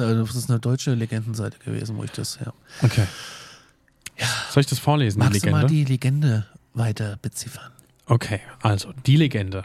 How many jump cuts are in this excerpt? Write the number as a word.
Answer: zero